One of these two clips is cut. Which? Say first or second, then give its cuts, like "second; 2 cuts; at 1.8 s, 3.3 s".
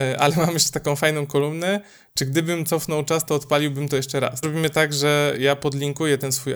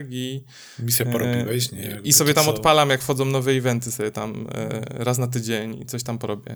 first; 1 cut; at 4.4 s